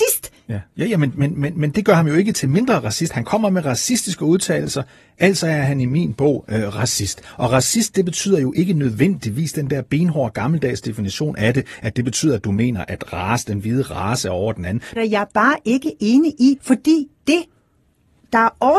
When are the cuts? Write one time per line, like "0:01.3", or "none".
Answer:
0:15.0
0:16.6